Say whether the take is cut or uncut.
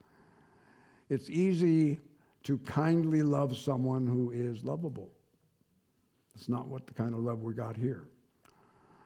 cut